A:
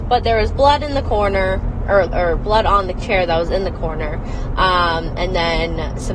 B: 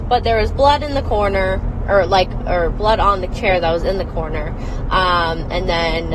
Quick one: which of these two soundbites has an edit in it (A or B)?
A